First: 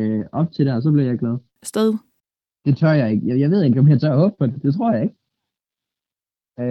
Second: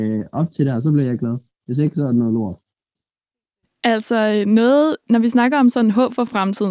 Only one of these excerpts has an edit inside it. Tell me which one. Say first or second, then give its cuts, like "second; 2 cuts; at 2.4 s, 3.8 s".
first; 1 cut; at 1.6 s